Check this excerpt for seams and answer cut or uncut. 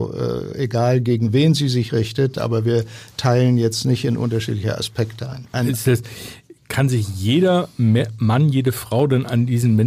cut